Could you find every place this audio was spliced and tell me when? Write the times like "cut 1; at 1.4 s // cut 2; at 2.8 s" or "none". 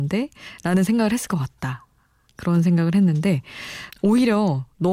cut 1; at 3.9 s